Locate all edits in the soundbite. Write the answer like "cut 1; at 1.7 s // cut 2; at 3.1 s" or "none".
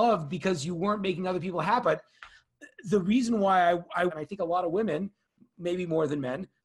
cut 1; at 1.8 s // cut 2; at 4.1 s